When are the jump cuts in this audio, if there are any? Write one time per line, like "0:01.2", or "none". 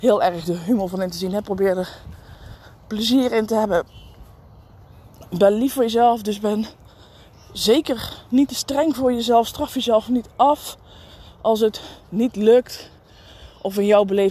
none